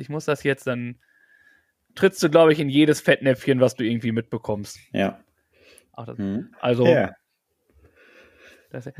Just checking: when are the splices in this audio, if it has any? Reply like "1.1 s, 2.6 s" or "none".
4.7 s, 6.5 s